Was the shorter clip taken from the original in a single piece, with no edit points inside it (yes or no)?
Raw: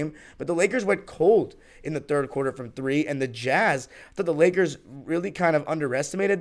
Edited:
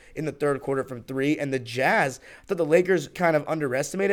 no